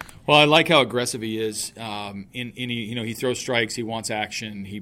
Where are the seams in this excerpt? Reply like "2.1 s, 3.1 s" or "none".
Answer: none